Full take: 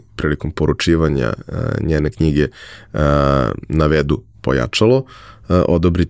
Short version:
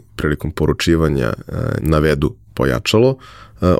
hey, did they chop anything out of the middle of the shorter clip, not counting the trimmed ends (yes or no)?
yes